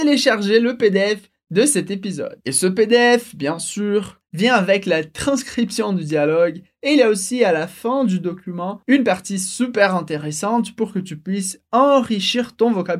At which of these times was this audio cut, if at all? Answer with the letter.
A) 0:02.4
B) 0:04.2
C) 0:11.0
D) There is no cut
B